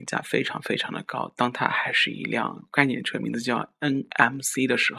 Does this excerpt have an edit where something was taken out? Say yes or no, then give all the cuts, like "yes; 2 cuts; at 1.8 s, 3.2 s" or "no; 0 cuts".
no; 0 cuts